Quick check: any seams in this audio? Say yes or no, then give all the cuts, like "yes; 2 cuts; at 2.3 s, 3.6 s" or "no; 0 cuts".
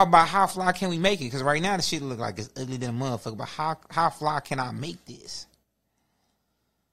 no; 0 cuts